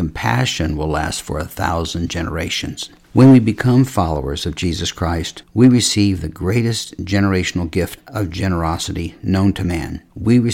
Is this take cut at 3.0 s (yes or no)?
no